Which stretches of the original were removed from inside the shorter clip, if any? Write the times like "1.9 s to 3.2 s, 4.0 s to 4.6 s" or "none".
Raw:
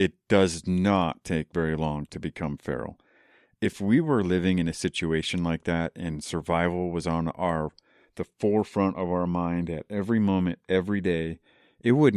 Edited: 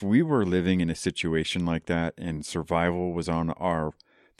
none